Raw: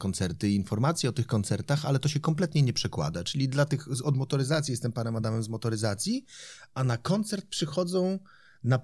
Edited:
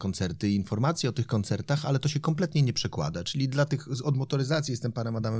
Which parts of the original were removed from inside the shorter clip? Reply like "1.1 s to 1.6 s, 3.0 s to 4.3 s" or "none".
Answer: none

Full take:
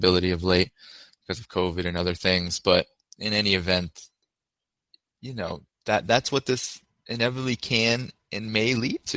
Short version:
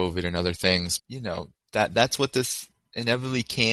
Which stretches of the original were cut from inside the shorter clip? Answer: 2.6 s to 5.1 s

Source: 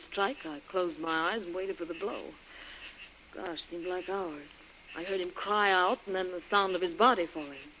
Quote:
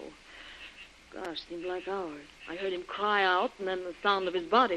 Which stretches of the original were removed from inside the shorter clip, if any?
4.6 s to 4.8 s

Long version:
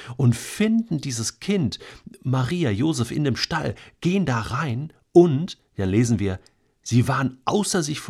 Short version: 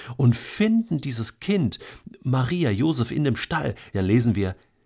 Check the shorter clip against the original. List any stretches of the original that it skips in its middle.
3.9 s to 5.8 s

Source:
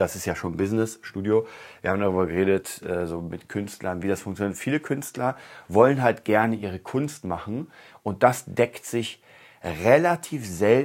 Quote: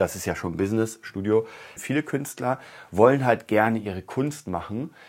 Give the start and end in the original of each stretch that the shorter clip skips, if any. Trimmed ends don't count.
1.8 s to 4.5 s

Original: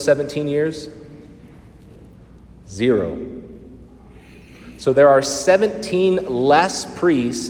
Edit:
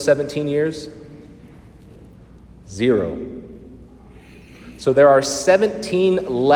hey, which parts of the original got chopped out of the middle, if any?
none

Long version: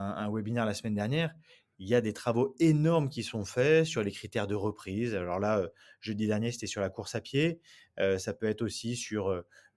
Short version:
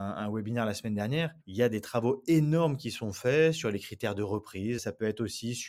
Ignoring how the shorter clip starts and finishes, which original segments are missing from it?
1.4 s to 1.7 s, 5.1 s to 8.2 s

